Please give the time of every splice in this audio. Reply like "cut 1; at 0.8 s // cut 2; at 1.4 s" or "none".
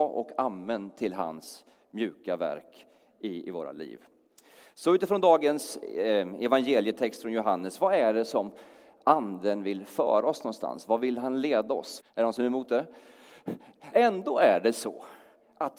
cut 1; at 12.0 s // cut 2; at 13.9 s